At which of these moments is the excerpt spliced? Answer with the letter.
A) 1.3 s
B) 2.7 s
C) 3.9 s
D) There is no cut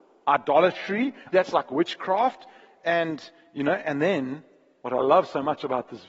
A